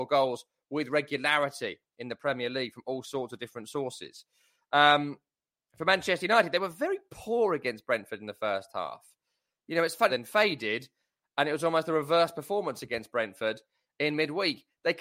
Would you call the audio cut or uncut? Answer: cut